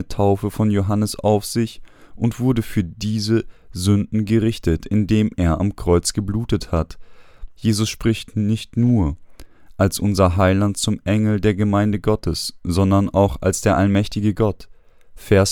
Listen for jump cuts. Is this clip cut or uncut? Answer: cut